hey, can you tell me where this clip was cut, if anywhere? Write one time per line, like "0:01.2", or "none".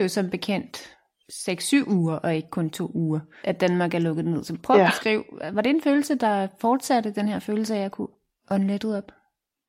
0:03.4